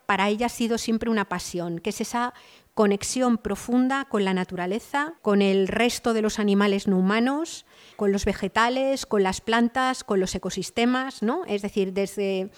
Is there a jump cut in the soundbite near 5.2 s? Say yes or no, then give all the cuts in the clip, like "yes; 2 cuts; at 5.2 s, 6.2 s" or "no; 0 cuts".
yes; 2 cuts; at 5.2 s, 7.9 s